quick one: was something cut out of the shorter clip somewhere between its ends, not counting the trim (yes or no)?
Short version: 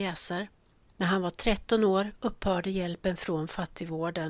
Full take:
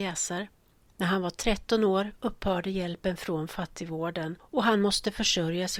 no